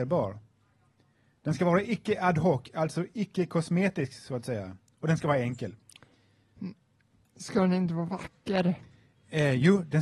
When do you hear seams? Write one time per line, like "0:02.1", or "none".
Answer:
none

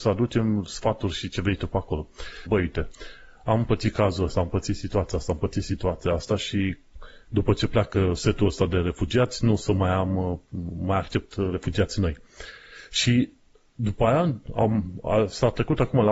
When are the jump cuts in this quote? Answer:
0:02.5

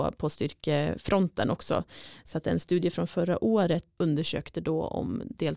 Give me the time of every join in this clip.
none

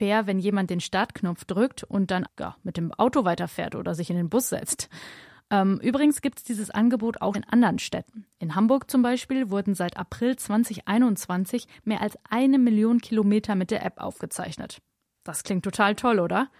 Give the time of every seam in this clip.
0:02.3
0:07.3

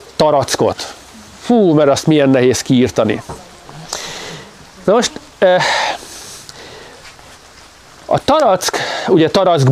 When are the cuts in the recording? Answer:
none

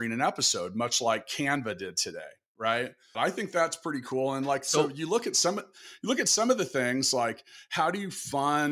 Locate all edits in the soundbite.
0:03.1

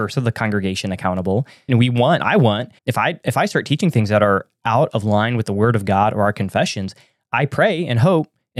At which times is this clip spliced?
0:01.7
0:02.8

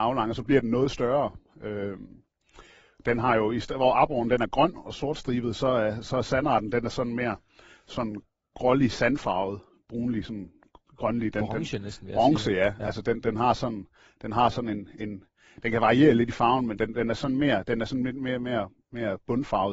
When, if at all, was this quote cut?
none

